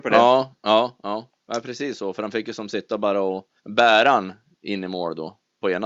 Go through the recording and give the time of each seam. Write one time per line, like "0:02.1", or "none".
0:03.6